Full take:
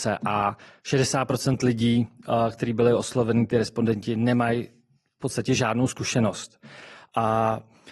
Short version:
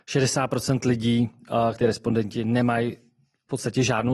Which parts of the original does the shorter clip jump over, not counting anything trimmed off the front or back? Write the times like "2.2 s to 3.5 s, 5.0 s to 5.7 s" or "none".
2.5 s to 3.5 s